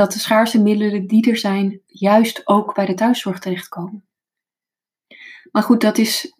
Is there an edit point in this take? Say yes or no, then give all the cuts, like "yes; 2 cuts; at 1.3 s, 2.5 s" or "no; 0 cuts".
no; 0 cuts